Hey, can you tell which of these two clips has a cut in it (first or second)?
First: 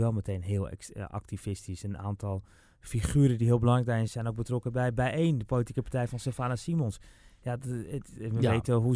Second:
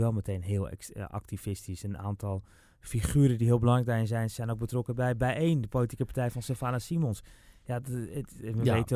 first